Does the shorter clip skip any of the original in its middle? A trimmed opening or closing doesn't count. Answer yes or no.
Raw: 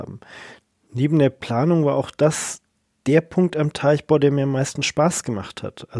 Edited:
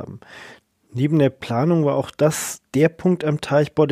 yes